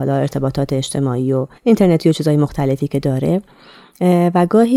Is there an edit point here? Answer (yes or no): yes